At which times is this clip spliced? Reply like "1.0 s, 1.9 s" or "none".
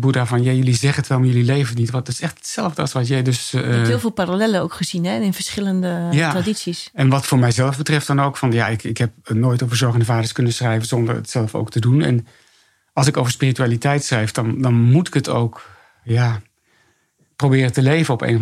none